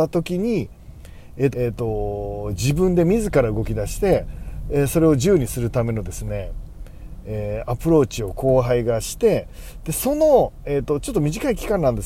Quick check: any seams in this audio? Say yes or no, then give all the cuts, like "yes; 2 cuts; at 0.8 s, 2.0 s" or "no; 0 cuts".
yes; 1 cut; at 1.5 s